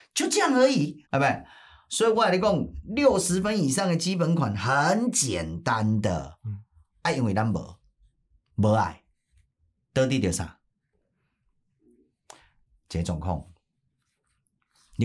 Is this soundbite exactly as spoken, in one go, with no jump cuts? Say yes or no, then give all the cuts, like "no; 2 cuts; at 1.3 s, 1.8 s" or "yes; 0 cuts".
no; 1 cut; at 1.1 s